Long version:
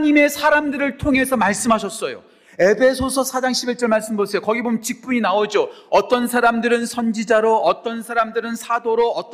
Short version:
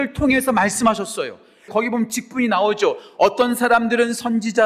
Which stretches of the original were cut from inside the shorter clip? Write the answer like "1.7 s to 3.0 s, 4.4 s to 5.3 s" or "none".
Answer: 2.5 s to 4.4 s